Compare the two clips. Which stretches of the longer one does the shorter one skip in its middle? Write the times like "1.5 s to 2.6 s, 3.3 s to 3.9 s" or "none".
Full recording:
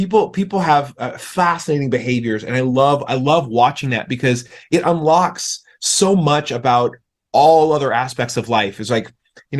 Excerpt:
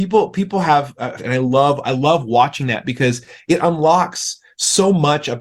1.2 s to 2.4 s

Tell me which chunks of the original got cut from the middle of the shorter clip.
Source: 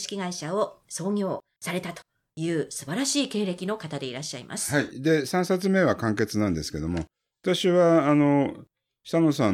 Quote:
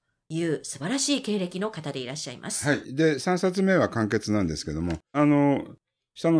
7.2 s to 8.0 s

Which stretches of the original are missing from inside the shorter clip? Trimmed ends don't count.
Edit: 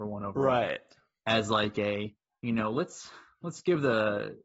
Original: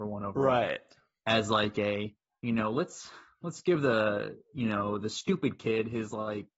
none

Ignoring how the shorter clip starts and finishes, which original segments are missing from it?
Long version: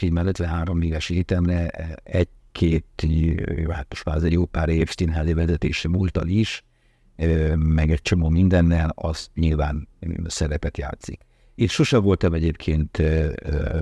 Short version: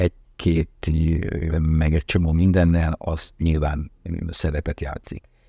3.7 s to 7.5 s

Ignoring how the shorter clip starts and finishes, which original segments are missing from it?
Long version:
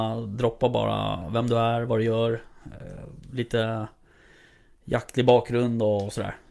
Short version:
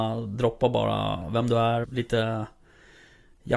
1.8 s to 3.2 s

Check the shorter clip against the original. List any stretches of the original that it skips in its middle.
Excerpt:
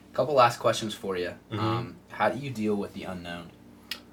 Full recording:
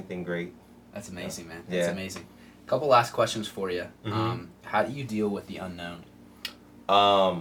none

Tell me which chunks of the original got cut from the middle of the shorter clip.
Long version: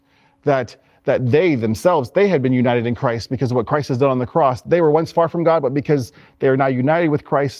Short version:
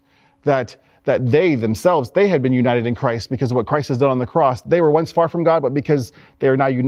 none

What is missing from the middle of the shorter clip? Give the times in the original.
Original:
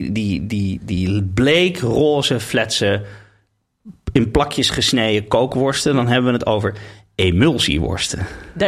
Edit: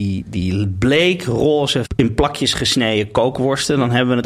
2.4 s to 4.0 s

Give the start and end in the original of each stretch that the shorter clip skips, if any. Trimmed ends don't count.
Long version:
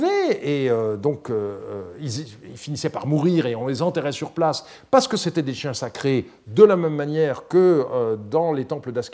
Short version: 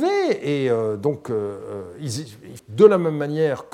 2.6 s to 6.4 s

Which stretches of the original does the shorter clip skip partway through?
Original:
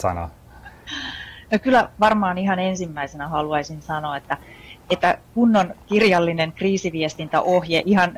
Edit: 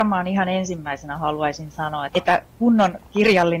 4.2 s to 4.8 s

